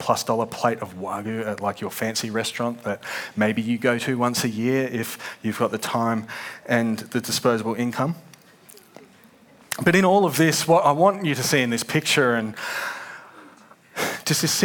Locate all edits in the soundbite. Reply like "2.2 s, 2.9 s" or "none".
none